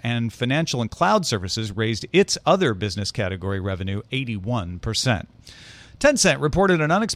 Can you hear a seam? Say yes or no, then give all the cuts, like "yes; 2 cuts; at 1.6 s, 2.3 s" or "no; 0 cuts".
yes; 1 cut; at 5.9 s